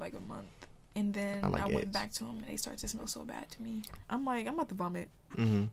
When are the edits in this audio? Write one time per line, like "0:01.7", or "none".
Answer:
0:04.0